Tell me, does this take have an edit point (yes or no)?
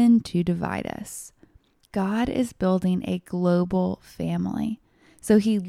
no